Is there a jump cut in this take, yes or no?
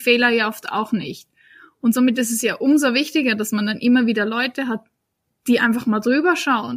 no